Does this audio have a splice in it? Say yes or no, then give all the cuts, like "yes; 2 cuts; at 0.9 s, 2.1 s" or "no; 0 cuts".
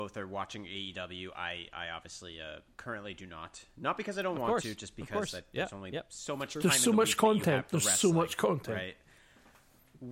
no; 0 cuts